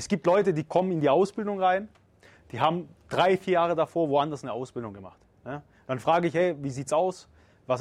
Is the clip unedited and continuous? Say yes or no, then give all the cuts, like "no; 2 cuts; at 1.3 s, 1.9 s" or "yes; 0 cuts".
yes; 0 cuts